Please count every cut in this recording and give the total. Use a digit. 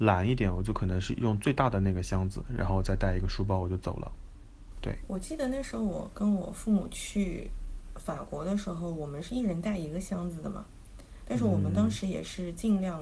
1